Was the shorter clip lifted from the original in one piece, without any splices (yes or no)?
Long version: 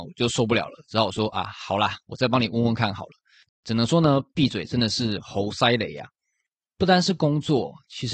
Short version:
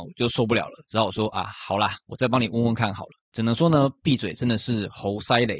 no